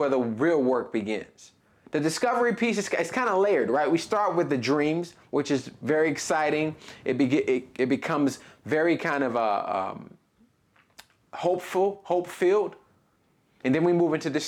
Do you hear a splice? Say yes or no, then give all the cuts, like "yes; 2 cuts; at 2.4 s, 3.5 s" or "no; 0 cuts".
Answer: no; 0 cuts